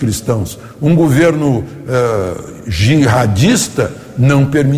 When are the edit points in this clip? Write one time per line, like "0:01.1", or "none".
none